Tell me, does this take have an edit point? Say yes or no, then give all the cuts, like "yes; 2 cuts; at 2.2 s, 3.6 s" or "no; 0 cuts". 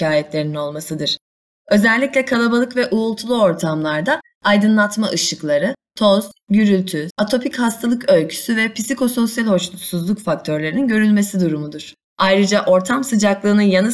yes; 2 cuts; at 7.1 s, 12.1 s